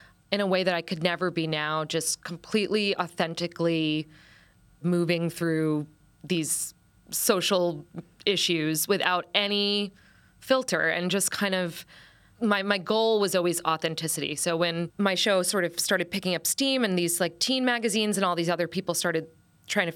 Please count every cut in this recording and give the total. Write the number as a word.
zero